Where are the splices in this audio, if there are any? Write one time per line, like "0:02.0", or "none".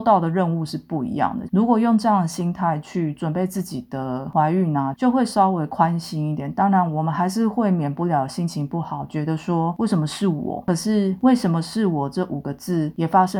0:01.5
0:04.9